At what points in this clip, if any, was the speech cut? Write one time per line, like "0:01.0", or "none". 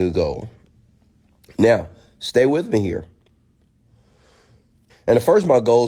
0:04.9